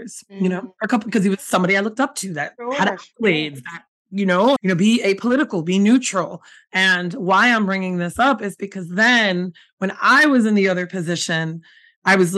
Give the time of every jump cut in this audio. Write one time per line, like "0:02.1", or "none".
0:04.6